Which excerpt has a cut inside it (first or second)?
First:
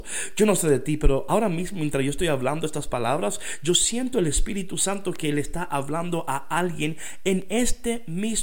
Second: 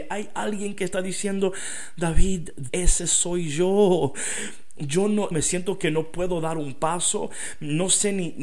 second